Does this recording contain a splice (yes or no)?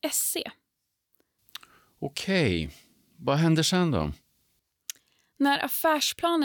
no